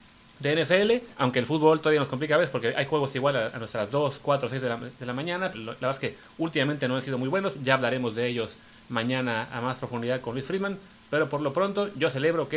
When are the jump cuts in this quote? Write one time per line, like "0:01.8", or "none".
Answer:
0:01.1
0:05.5